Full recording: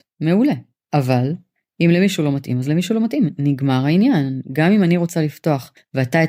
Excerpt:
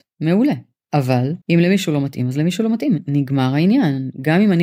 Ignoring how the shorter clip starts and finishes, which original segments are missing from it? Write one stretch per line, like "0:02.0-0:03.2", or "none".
0:01.4-0:01.7